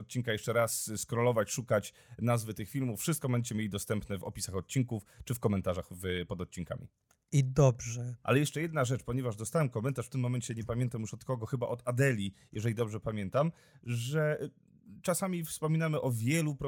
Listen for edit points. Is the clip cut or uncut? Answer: cut